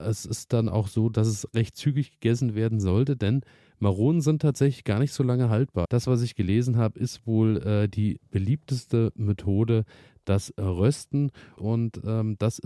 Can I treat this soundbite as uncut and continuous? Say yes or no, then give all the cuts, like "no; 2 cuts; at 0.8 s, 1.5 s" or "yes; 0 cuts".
no; 2 cuts; at 5.8 s, 11.6 s